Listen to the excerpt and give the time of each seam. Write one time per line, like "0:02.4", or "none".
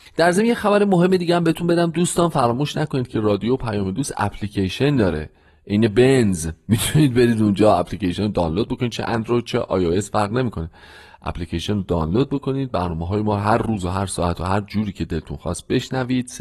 none